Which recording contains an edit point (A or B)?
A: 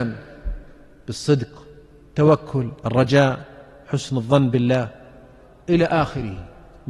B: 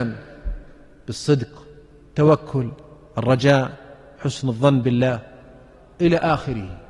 A